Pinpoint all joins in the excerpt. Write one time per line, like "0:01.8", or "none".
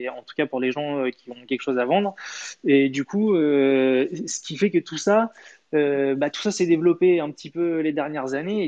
none